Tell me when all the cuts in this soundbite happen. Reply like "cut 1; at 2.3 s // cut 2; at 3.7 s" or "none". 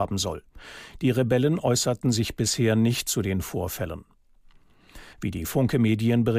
cut 1; at 5.1 s